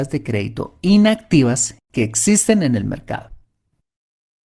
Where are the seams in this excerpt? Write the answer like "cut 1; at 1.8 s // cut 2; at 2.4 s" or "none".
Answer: none